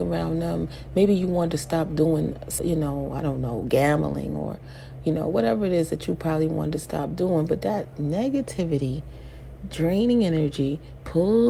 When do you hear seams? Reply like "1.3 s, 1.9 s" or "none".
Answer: 2.6 s